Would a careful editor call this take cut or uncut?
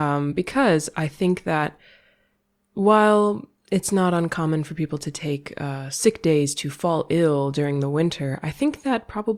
uncut